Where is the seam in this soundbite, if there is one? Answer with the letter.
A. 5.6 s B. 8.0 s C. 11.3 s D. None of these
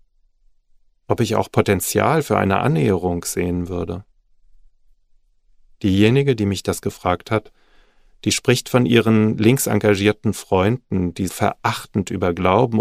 C